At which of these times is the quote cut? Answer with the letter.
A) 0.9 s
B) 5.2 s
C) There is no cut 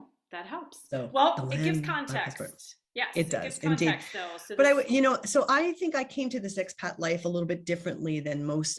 C